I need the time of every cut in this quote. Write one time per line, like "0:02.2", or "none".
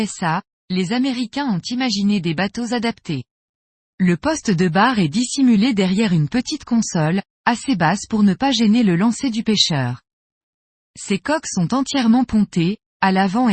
0:03.9